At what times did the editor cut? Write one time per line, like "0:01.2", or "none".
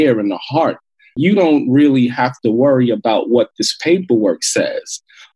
0:01.2